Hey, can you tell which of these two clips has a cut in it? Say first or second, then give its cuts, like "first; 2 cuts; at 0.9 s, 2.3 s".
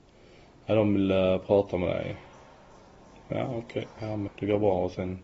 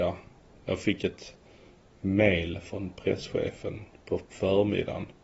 first; 1 cut; at 4.3 s